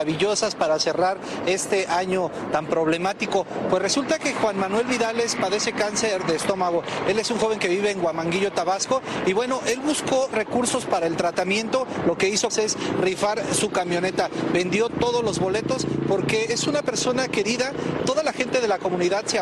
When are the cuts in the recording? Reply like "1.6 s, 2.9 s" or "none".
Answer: 12.5 s, 18.0 s

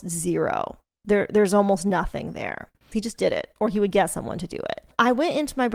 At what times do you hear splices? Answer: 2.9 s

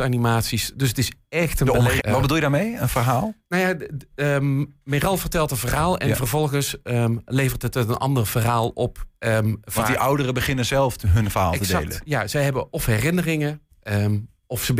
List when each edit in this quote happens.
2.0 s

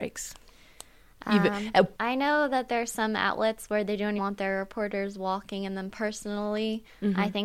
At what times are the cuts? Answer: 2.0 s, 4.2 s

